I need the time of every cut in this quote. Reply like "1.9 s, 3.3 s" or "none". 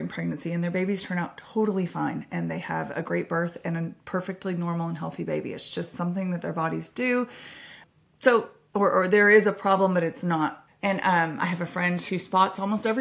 10.7 s